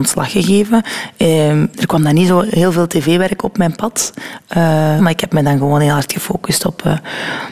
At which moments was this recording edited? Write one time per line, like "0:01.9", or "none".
0:01.7
0:05.0